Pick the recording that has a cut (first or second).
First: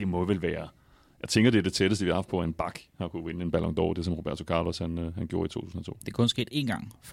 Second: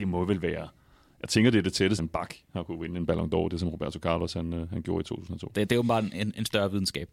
second